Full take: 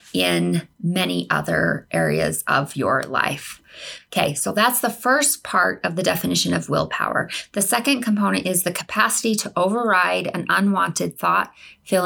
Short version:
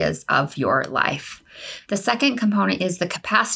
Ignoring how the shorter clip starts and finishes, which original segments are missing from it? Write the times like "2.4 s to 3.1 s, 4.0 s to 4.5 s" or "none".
4.0 s to 7.5 s